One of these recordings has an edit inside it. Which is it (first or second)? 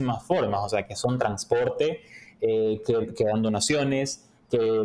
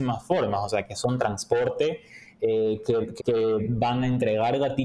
second